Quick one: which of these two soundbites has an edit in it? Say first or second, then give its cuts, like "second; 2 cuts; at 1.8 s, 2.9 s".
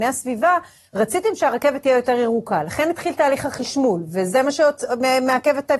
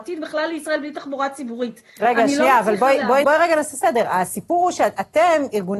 second; 1 cut; at 3.2 s